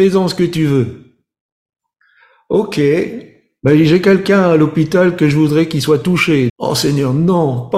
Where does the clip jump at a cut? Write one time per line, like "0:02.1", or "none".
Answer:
0:06.5